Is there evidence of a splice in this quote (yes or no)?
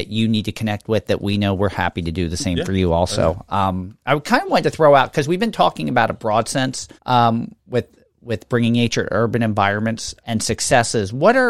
yes